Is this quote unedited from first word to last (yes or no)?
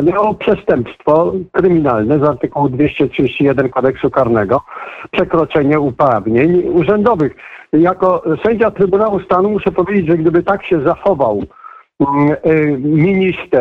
yes